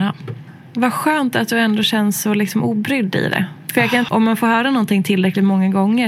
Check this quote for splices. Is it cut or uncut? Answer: cut